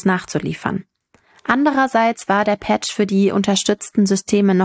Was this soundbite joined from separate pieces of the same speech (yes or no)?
no